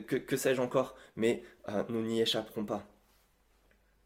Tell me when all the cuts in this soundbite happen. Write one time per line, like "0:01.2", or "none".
none